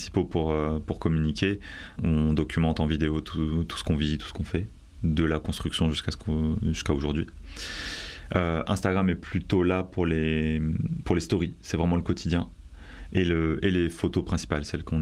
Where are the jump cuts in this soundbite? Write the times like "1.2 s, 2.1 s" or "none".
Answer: 2.0 s